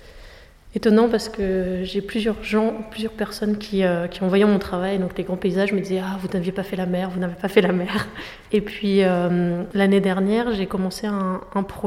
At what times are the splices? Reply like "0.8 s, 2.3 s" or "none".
8.5 s